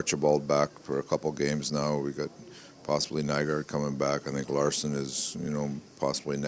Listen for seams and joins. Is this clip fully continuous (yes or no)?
yes